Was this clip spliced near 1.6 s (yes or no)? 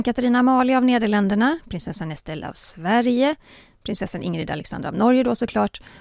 yes